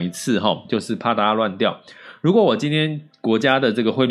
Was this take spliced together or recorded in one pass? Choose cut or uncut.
uncut